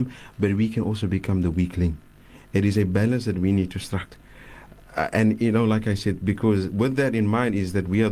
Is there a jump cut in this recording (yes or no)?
no